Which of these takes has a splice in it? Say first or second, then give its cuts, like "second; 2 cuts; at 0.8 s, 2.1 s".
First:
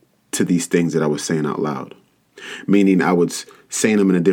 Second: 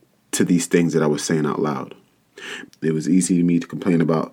second; 1 cut; at 2.6 s